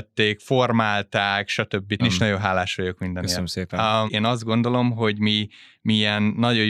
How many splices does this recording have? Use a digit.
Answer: 2